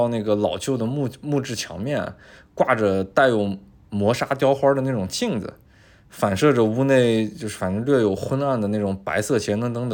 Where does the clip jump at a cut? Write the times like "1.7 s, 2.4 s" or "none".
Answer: none